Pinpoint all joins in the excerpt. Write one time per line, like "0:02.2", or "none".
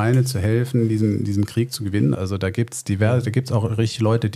0:02.1